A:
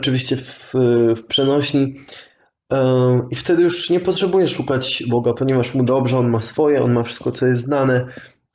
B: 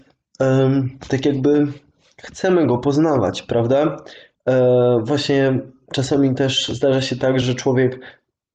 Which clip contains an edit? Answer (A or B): B